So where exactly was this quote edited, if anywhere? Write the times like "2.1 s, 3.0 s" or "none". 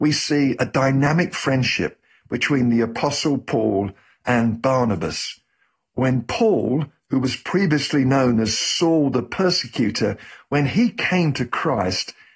none